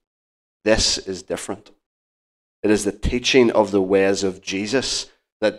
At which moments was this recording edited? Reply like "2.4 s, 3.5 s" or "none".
2.6 s